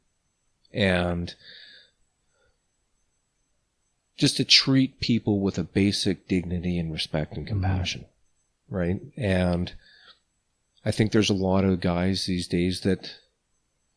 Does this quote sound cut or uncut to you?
uncut